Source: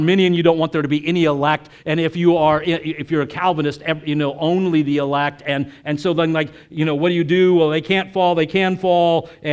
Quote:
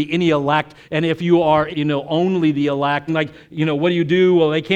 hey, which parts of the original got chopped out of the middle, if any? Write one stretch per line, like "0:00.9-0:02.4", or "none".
0:02.6-0:04.0
0:05.4-0:06.3

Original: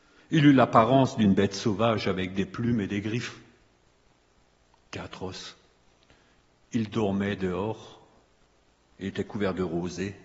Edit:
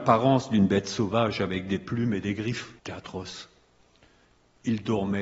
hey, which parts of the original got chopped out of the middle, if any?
0:03.5-0:04.9

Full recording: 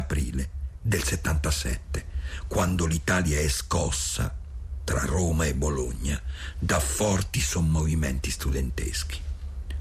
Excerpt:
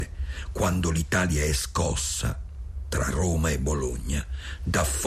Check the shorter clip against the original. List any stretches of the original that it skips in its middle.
none

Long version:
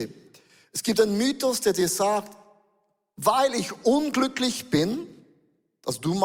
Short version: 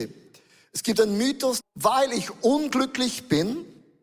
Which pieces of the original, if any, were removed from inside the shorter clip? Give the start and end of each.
0:01.6-0:03.0

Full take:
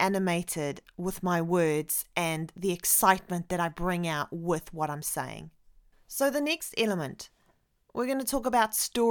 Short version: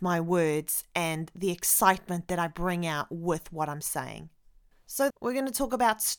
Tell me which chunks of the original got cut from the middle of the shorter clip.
0:06.3-0:07.8

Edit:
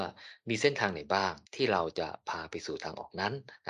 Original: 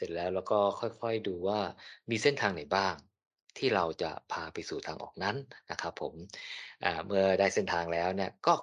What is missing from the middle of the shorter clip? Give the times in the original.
0:03.1-0:03.5

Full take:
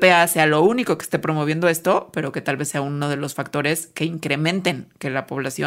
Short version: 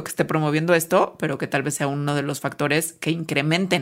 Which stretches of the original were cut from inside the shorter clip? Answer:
none

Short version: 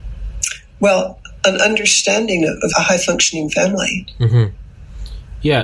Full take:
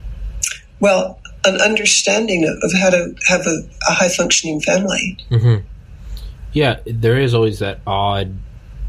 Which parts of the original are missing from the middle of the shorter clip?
0:02.7-0:03.8

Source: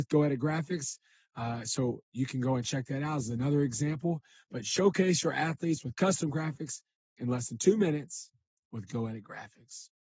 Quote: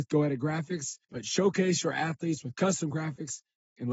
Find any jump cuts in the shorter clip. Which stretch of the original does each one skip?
0:01.0-0:04.4

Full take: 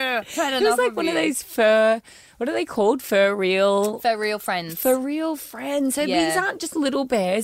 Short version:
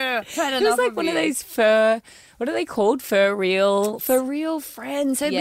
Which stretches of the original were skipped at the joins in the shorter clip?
0:04.0-0:04.7

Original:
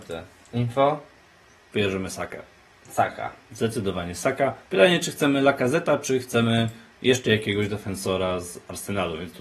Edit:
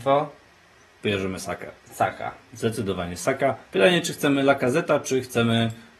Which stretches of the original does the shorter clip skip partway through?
0:02.5-0:02.8

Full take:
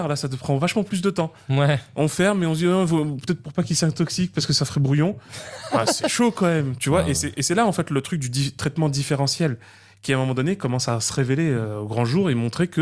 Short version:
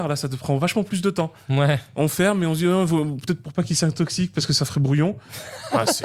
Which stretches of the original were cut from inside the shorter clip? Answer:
none

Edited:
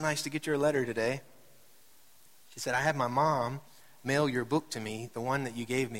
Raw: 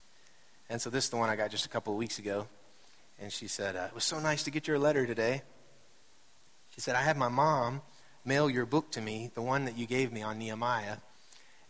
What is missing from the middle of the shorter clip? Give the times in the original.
none

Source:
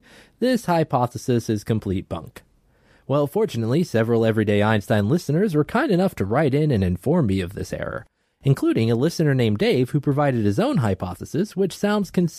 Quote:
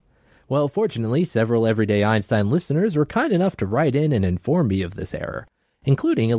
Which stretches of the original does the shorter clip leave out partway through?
none

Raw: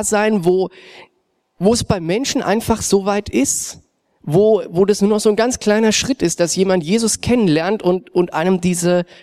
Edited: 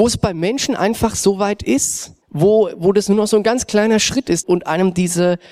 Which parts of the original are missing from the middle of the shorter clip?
0:03.9-0:04.1
0:06.4-0:08.1

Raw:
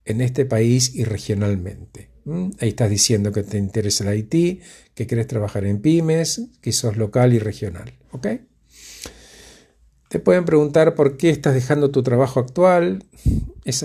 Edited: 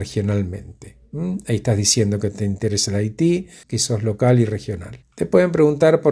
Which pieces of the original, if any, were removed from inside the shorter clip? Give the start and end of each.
0:04.8-0:06.6
0:08.0-0:10.0

